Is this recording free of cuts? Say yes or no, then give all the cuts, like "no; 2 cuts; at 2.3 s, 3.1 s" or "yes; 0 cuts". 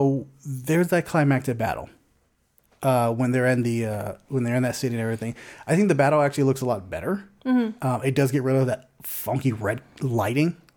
yes; 0 cuts